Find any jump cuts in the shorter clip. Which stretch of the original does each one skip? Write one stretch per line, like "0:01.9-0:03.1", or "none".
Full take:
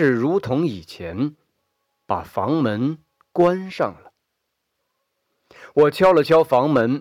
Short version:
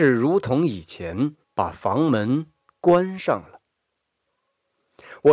0:01.4-0:02.0